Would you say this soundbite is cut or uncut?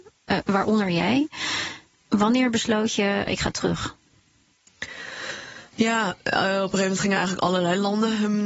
cut